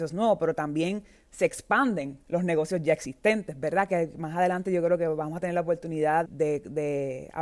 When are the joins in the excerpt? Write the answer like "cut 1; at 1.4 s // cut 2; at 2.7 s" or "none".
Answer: cut 1; at 3.9 s // cut 2; at 6.3 s